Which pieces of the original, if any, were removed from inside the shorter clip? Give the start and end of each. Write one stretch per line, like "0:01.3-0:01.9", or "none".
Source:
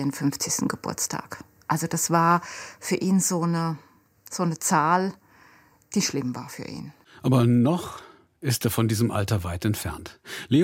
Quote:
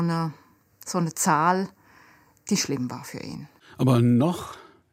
none